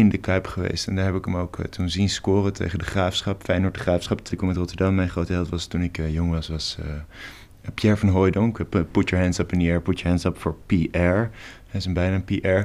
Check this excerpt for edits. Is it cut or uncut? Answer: cut